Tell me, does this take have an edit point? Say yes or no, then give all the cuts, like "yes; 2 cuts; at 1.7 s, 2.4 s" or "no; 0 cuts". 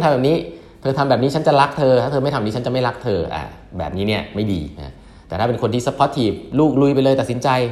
no; 0 cuts